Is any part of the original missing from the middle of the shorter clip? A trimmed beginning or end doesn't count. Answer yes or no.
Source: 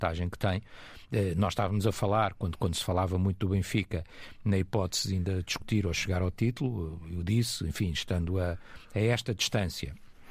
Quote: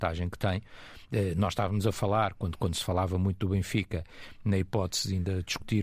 no